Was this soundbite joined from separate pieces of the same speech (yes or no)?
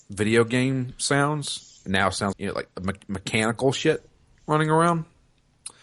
yes